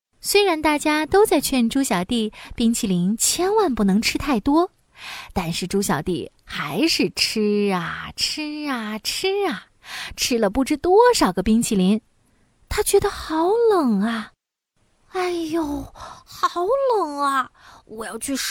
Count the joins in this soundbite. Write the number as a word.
zero